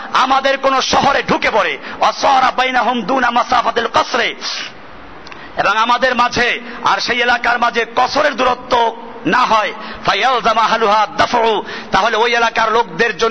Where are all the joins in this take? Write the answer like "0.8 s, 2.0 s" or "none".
2.6 s